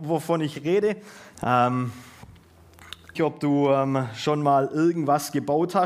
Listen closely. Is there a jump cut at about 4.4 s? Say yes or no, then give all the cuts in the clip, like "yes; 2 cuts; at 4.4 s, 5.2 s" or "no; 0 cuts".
no; 2 cuts; at 1.3 s, 3.1 s